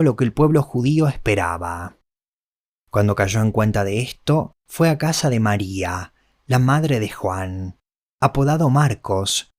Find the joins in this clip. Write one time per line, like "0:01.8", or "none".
none